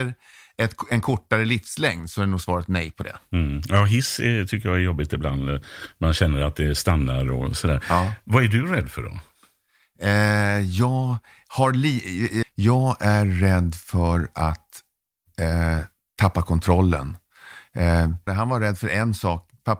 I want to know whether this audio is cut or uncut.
cut